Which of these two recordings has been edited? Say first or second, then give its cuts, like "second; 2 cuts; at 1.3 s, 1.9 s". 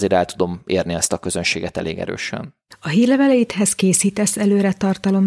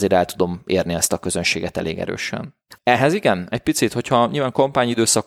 second; 1 cut; at 2.8 s